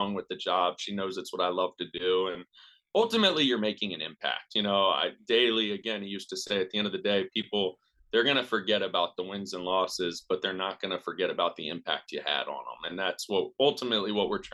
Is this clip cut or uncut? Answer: uncut